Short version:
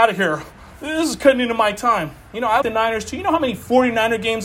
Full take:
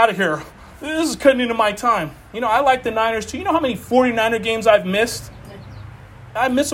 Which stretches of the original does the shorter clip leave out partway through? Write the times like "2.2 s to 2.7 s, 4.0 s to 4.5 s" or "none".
2.6 s to 2.8 s